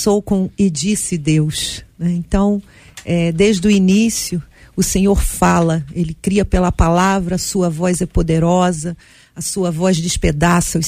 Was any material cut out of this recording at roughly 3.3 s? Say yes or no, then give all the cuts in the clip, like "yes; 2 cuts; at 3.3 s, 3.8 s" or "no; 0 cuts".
no; 0 cuts